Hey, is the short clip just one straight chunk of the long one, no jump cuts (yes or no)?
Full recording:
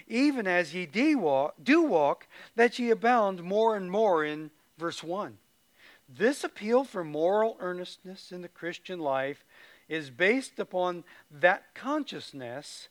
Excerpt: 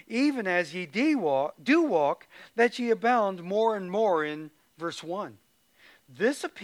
yes